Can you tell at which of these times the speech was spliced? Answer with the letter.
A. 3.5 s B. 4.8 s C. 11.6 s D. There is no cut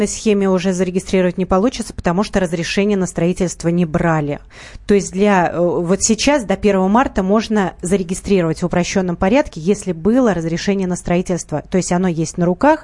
D